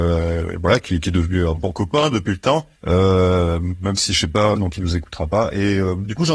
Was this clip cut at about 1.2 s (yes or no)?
no